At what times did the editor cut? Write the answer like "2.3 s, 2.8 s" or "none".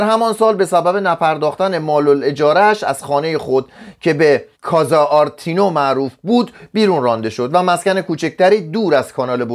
4.5 s